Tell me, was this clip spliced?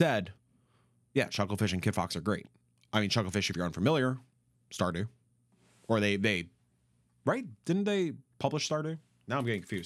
no; 0 cuts

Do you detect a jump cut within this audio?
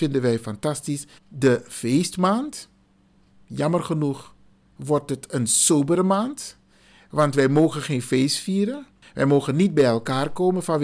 yes; 1 cut; at 1.2 s

